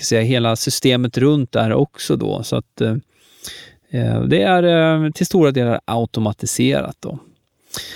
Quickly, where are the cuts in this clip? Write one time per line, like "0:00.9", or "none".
none